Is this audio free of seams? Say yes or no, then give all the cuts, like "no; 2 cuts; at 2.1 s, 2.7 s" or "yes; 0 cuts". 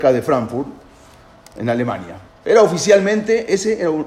no; 1 cut; at 2.3 s